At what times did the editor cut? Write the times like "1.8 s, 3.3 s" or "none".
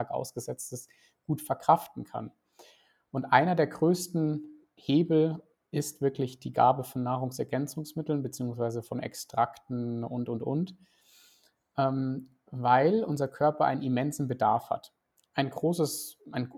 none